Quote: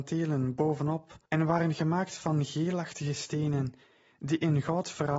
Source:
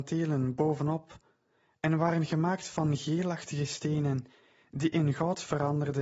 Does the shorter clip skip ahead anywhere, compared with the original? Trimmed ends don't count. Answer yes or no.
yes